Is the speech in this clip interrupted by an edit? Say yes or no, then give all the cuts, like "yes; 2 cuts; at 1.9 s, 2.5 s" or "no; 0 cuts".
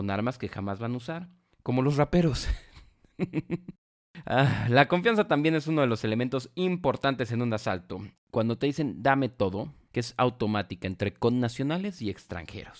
yes; 2 cuts; at 8.1 s, 9.9 s